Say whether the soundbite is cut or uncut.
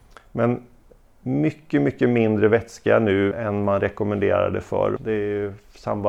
cut